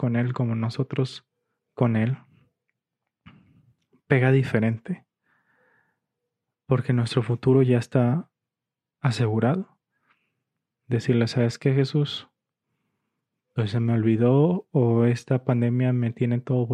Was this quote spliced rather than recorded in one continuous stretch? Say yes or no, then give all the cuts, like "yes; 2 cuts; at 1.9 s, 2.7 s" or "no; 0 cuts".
yes; 1 cut; at 10.7 s